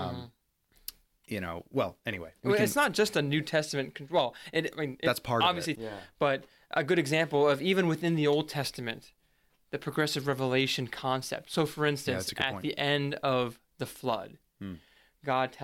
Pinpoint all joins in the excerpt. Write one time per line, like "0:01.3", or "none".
0:05.7

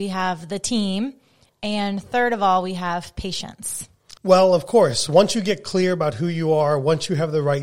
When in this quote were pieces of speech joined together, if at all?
0:04.2

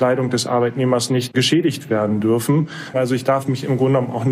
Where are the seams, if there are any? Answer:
0:02.9

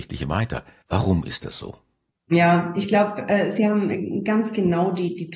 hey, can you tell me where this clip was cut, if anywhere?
none

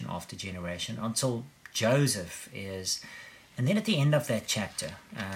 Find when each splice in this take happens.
0:03.5

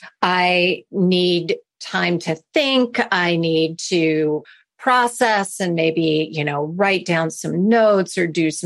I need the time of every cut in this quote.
none

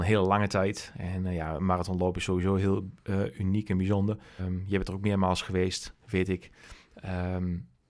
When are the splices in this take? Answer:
0:04.4

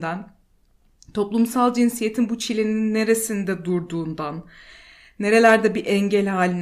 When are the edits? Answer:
none

